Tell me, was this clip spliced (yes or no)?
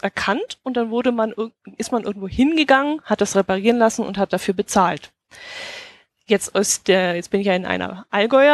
no